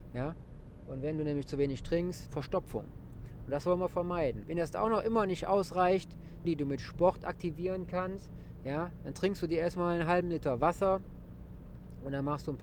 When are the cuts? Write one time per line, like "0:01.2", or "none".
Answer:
0:02.3
0:04.4
0:06.4